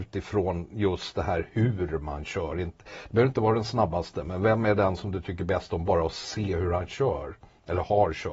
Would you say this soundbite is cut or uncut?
uncut